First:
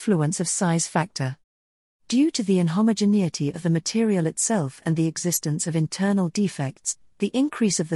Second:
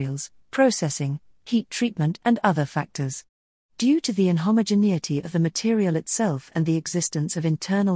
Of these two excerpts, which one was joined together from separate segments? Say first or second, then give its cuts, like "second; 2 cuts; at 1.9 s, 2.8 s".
second; 1 cut; at 3.6 s